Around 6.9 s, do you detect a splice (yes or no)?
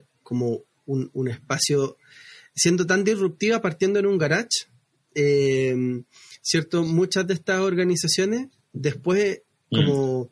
no